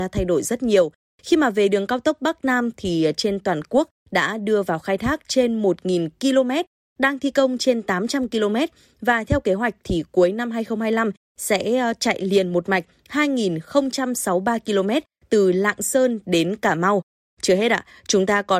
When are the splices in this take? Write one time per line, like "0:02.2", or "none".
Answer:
none